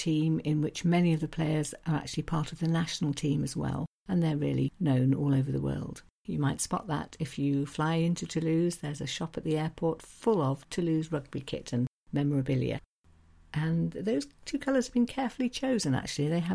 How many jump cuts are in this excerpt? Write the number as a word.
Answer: two